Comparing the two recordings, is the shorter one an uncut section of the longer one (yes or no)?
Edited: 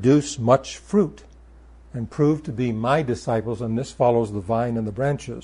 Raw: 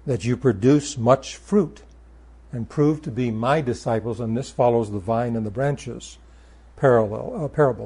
yes